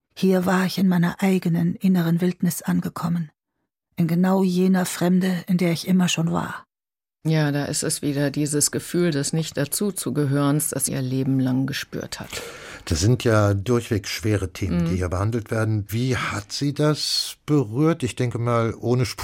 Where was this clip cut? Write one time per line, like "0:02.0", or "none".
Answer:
0:10.9
0:15.9